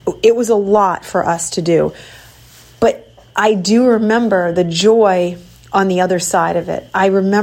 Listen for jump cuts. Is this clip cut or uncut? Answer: uncut